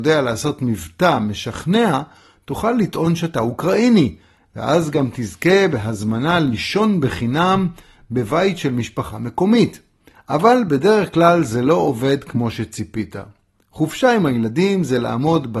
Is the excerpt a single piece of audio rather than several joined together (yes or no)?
no